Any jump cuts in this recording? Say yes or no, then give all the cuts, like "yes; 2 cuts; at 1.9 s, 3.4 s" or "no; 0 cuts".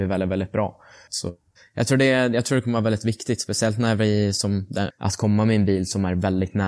yes; 2 cuts; at 1.1 s, 4.9 s